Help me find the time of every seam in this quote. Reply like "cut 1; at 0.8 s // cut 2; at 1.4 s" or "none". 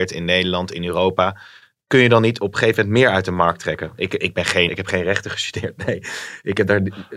cut 1; at 4.7 s